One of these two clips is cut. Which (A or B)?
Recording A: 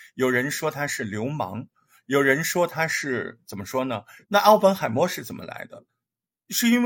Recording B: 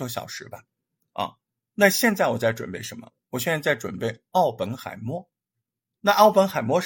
A